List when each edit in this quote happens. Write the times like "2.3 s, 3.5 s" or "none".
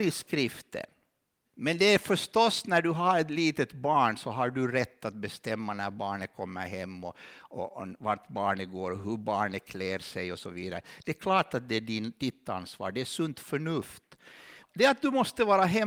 1.4 s, 14.6 s